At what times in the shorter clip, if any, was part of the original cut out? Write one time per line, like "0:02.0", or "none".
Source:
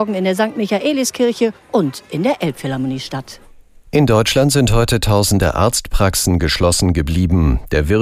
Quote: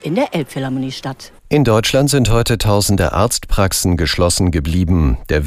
0:01.4

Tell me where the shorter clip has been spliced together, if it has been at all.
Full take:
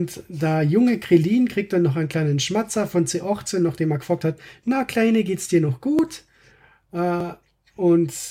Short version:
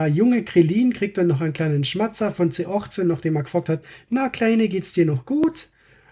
none

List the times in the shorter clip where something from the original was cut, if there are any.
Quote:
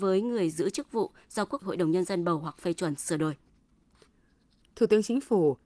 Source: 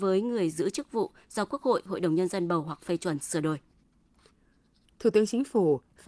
0:01.6

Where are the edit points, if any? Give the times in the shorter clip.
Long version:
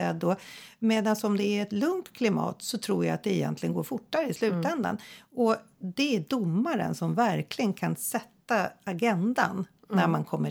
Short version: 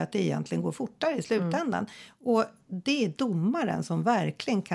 none

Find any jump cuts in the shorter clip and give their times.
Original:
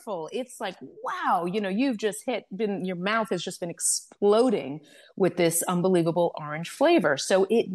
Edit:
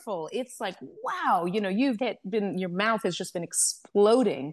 0:02.0

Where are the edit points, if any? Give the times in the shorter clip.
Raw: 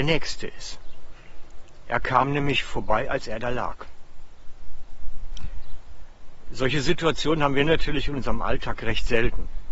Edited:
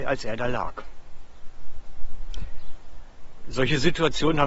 none

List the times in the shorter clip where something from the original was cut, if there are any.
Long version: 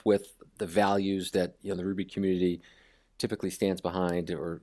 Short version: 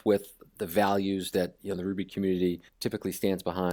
0:02.7

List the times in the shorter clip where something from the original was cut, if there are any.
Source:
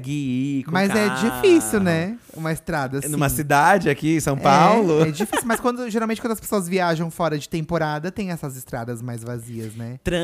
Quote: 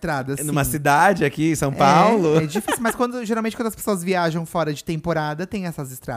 none

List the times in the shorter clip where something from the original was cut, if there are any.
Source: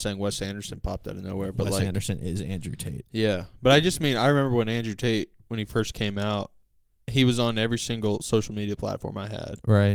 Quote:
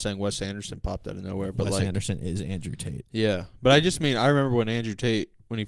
none

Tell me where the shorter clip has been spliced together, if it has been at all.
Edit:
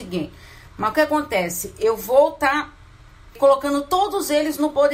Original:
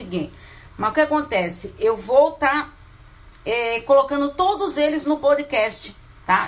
0:03.4

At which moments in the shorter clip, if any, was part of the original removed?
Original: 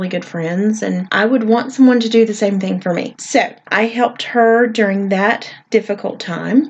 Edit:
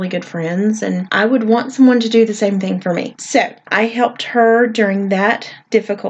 none

